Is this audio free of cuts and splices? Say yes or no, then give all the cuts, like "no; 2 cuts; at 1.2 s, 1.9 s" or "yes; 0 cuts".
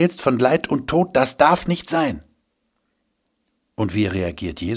yes; 0 cuts